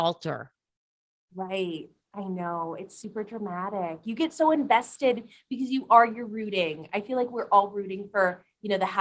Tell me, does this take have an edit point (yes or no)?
no